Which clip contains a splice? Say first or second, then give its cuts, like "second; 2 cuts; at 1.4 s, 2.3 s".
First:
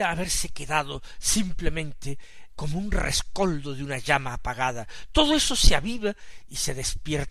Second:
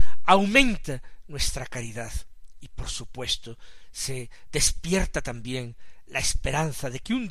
first; 1 cut; at 2.5 s